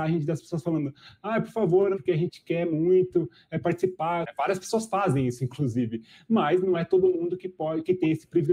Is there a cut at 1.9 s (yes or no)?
yes